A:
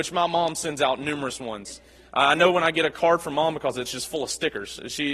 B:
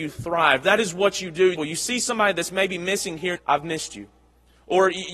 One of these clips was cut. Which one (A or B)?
B